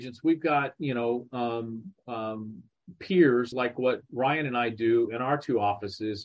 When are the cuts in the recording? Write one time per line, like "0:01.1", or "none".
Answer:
none